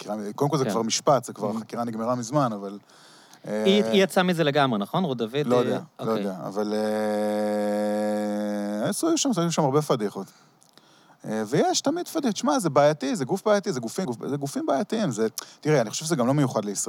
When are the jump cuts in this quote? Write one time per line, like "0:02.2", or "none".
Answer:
0:14.0